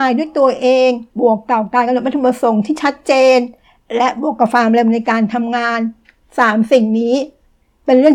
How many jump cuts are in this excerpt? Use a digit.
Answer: 1